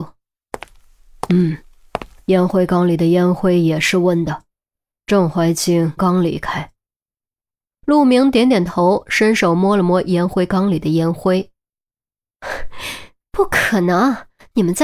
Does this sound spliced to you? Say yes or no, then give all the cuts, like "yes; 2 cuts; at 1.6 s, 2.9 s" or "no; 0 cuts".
yes; 1 cut; at 6.0 s